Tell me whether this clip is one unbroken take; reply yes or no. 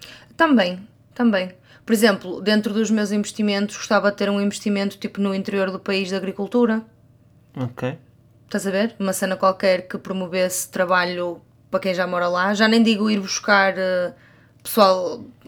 yes